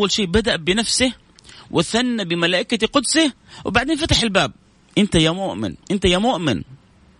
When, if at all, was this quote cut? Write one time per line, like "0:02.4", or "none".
0:05.8